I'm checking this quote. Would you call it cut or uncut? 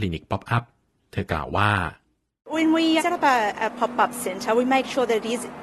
cut